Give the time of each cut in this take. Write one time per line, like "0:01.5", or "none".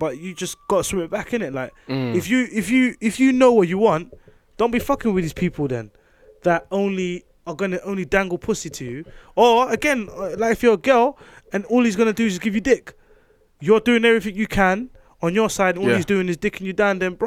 0:15.7